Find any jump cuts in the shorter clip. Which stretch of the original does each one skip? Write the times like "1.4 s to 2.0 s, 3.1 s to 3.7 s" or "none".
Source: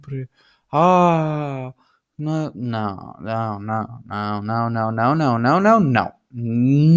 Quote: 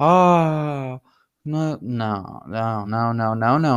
3.6 s to 4.4 s